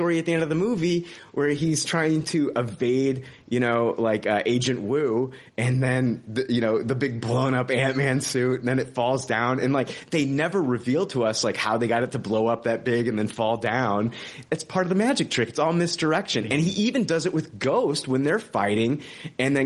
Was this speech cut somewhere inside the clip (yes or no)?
no